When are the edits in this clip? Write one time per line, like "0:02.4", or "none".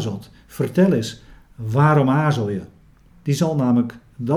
0:03.1